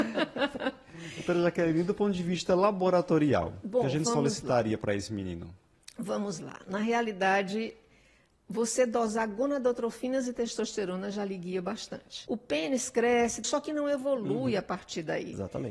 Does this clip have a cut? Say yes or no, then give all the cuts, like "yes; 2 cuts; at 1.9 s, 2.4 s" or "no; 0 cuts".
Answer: yes; 2 cuts; at 12.2 s, 13.4 s